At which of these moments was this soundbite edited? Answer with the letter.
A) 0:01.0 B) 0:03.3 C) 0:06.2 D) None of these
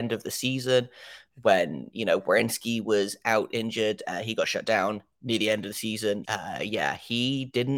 C